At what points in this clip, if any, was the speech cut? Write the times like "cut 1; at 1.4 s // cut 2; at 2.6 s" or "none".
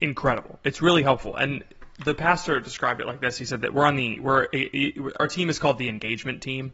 cut 1; at 5.2 s